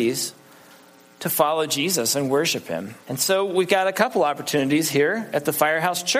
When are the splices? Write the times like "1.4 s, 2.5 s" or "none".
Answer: 3.0 s